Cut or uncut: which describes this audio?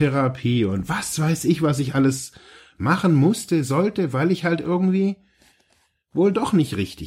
uncut